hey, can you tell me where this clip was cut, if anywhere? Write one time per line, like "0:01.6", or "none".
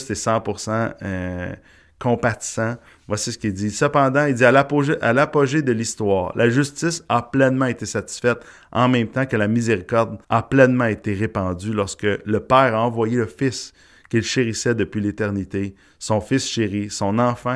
0:10.2